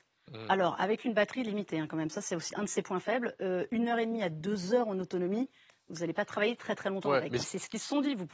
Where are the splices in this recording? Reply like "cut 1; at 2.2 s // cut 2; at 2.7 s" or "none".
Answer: cut 1; at 2.5 s // cut 2; at 7.4 s